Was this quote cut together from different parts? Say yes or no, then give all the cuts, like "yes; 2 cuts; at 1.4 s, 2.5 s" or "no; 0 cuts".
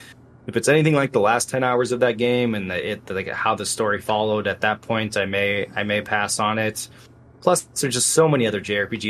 no; 0 cuts